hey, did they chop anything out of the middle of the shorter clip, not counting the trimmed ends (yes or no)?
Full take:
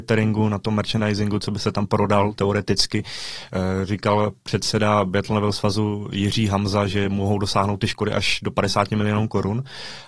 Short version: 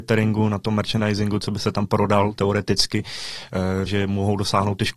yes